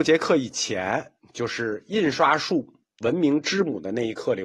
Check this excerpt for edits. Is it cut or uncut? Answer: uncut